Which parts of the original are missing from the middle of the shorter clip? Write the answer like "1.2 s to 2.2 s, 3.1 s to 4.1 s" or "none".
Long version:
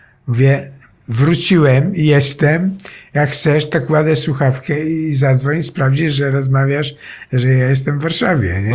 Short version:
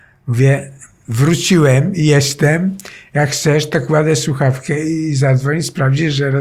none